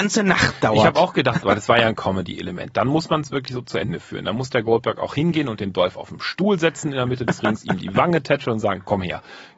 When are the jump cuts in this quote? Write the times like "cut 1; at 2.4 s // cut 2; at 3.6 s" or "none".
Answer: cut 1; at 1.4 s